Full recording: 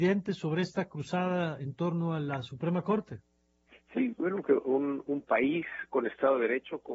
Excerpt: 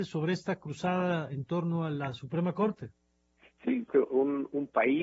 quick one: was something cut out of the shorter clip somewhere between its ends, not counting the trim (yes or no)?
yes